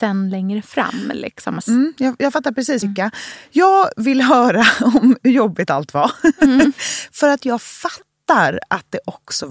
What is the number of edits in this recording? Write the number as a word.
two